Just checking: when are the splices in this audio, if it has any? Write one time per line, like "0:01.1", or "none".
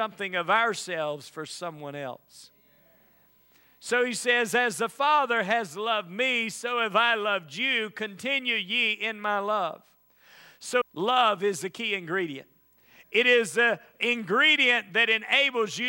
0:10.8